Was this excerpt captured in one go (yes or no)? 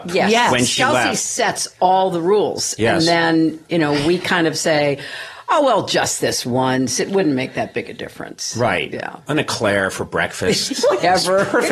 yes